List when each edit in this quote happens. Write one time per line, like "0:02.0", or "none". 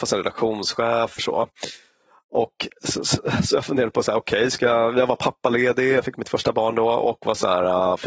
0:01.2